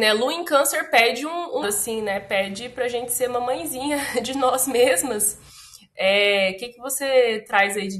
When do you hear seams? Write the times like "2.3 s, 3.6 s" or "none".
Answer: 1.6 s